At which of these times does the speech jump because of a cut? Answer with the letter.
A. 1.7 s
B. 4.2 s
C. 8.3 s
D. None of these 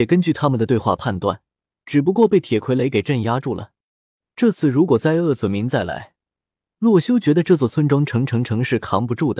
A